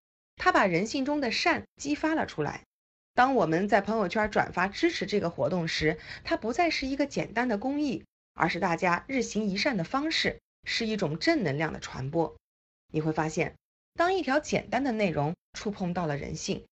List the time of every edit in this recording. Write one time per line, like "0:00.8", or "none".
none